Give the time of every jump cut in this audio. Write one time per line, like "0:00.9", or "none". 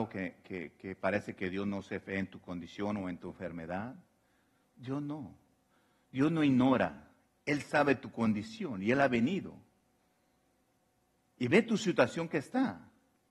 none